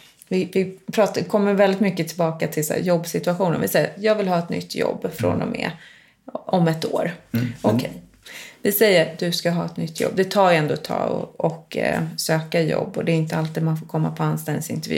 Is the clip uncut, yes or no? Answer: yes